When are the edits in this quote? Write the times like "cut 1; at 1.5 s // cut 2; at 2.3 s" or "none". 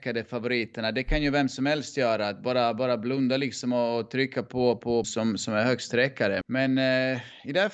cut 1; at 5.0 s // cut 2; at 6.4 s